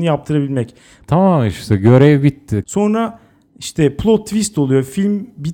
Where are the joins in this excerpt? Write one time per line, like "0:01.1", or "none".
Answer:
0:01.0
0:02.6

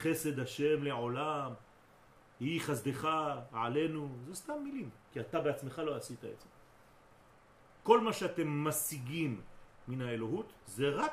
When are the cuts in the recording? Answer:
0:05.1
0:07.8

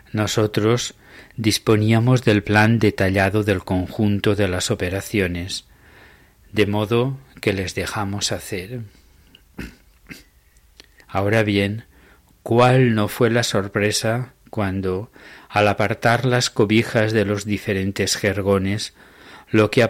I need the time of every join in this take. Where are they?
0:11.0

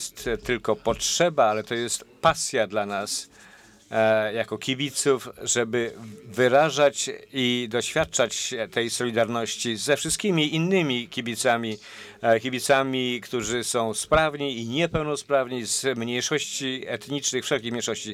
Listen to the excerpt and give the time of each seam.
none

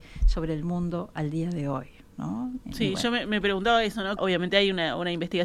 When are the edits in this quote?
0:04.2

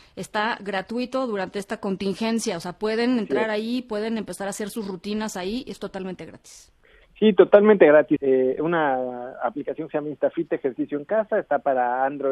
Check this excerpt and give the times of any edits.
0:08.2

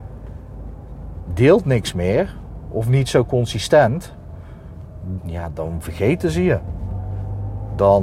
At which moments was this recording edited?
0:05.2

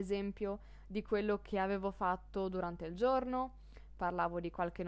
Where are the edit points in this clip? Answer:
0:04.0

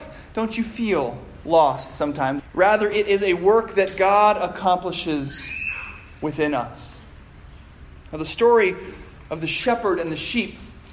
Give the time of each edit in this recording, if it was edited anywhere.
0:02.4

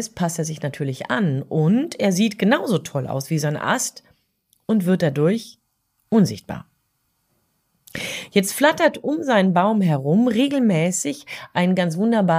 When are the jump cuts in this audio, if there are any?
none

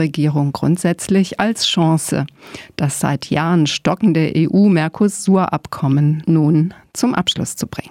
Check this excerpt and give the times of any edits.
none

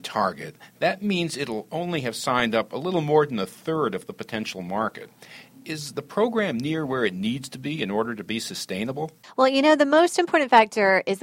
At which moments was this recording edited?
none

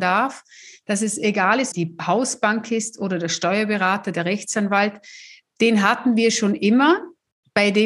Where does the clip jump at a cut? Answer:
0:01.7

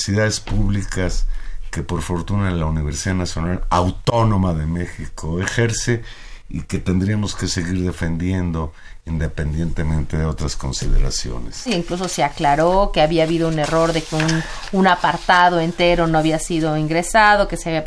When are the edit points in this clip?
0:11.7

